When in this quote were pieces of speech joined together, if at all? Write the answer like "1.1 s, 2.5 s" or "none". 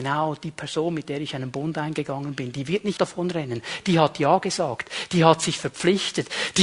3.0 s